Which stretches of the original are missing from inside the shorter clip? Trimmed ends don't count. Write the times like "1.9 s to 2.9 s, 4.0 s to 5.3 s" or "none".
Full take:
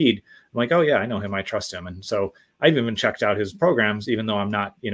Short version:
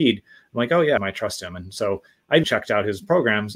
1.0 s to 1.3 s, 2.7 s to 3.0 s